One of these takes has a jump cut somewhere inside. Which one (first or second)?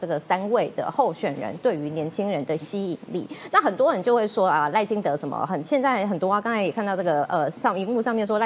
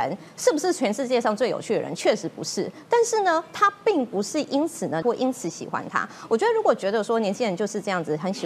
second